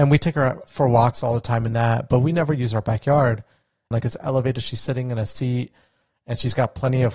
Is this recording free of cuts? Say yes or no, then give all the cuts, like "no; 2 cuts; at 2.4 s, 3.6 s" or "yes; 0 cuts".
no; 1 cut; at 3.9 s